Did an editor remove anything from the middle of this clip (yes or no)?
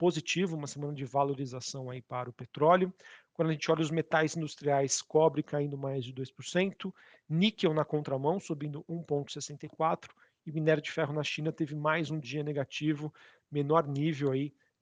no